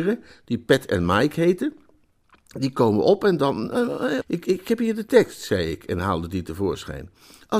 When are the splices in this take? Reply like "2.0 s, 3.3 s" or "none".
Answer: 4.2 s